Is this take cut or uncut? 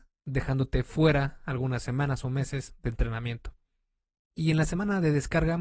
cut